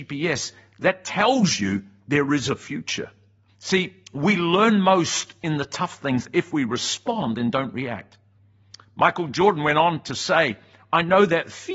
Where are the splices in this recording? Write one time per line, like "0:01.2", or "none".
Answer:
0:03.5